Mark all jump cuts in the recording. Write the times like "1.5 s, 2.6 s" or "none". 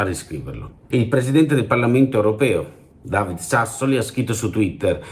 0.9 s